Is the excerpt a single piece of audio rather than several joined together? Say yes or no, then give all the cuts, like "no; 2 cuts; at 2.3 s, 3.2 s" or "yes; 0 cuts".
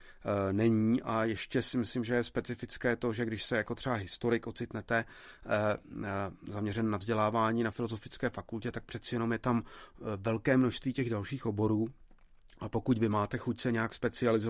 yes; 0 cuts